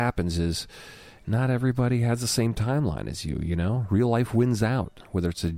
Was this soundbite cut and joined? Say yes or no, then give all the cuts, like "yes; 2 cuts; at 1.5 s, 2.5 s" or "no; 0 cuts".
no; 0 cuts